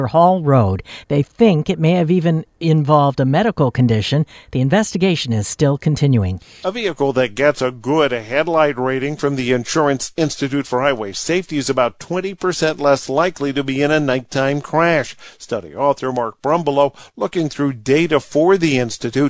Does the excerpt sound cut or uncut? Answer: cut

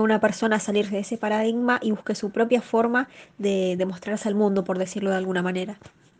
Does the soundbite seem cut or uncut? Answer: uncut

